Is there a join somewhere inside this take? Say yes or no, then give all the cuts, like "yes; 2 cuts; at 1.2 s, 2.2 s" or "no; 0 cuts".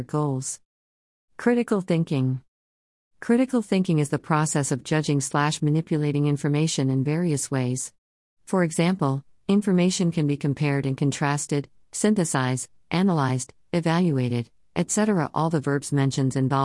no; 0 cuts